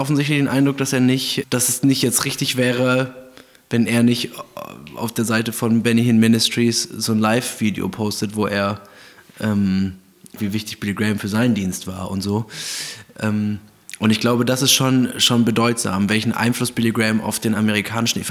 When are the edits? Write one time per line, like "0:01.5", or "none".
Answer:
0:01.4
0:10.4